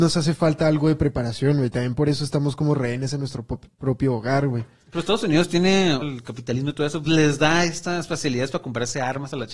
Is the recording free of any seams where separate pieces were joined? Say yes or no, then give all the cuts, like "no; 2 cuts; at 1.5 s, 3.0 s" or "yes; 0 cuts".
no; 2 cuts; at 6.0 s, 7.0 s